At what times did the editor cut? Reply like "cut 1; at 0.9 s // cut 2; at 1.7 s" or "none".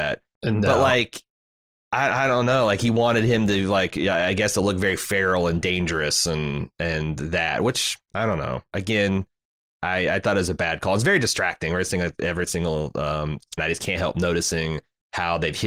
cut 1; at 13.6 s

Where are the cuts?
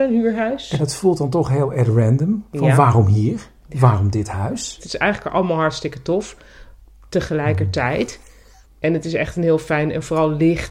cut 1; at 4.8 s // cut 2; at 8.6 s

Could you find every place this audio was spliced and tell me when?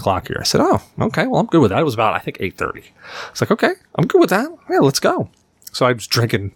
none

